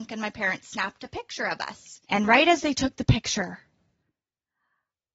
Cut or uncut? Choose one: cut